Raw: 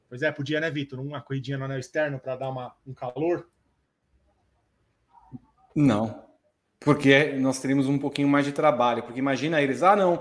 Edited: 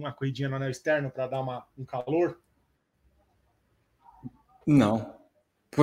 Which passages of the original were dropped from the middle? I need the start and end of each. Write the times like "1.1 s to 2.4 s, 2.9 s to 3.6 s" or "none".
none